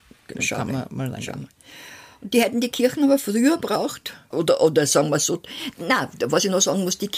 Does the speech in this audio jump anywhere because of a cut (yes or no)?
yes